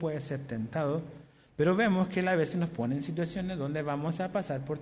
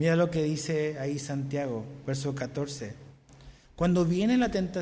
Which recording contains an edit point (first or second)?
second